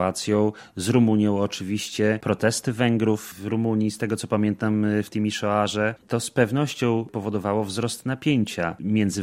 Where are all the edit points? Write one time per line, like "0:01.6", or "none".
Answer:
0:06.0